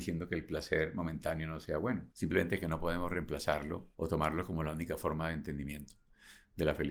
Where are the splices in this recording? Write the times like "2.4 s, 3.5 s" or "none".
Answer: 2.1 s, 3.9 s